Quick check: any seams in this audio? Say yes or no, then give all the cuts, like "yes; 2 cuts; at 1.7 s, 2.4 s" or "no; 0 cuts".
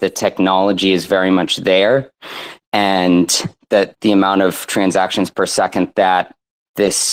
yes; 1 cut; at 3.9 s